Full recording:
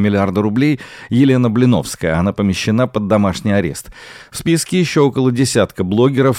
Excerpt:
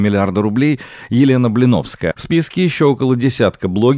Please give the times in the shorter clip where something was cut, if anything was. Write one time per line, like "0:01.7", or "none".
0:02.1